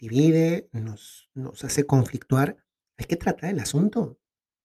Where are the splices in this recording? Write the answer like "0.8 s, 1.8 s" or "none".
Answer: none